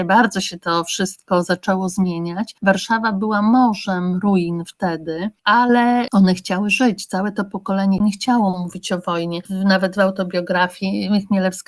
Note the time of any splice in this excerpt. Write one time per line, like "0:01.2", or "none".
none